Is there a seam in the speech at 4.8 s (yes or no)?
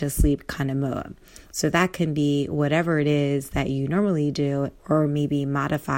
yes